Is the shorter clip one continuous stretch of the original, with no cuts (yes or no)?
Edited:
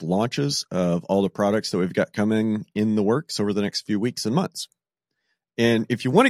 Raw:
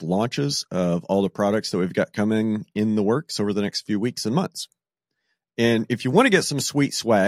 yes